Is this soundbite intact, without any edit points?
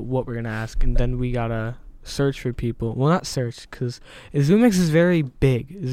yes; 0 cuts

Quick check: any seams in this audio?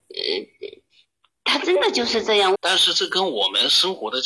yes; 1 cut; at 2.5 s

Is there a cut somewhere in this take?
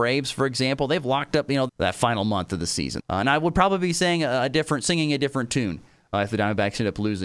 yes; 2 cuts; at 1.7 s, 3.0 s

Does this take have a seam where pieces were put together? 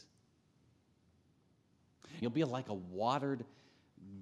yes; 1 cut; at 2.2 s

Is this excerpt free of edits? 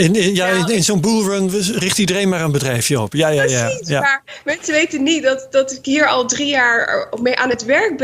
yes; 0 cuts

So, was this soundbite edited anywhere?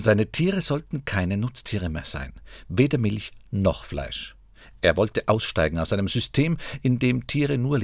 no; 0 cuts

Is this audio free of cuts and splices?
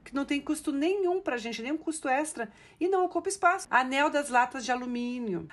no; 1 cut; at 3.6 s

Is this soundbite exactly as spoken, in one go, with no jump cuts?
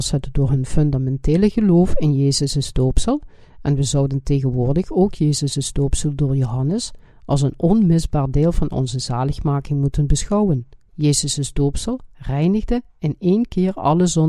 no; 1 cut; at 10.9 s

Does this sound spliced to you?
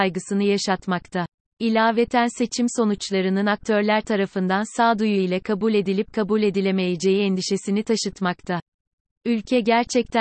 no; 0 cuts

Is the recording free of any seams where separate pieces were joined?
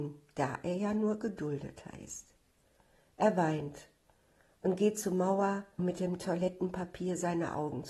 no; 1 cut; at 5.8 s

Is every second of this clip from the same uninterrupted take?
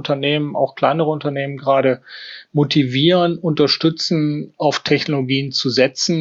yes; 0 cuts

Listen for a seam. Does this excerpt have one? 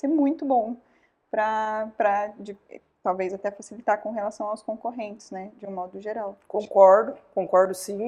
no; 0 cuts

